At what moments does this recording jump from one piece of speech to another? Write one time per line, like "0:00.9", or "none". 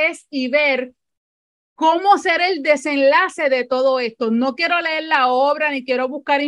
none